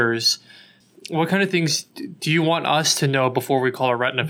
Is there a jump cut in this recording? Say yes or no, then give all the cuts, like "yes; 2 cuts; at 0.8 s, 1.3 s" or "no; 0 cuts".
no; 0 cuts